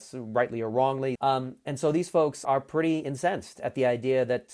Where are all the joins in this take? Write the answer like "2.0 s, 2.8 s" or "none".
1.2 s, 2.4 s